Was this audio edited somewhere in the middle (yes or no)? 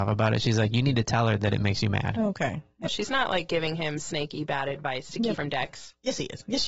yes